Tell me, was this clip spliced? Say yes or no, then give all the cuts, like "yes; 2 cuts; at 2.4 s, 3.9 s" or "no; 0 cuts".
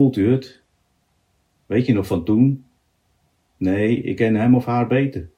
yes; 1 cut; at 1.6 s